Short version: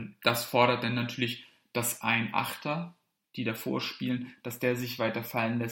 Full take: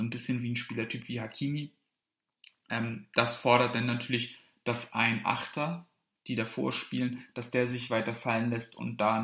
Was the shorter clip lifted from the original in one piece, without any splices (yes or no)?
yes